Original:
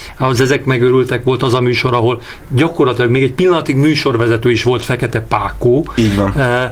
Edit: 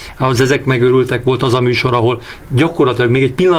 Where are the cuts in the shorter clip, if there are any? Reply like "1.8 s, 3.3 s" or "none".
none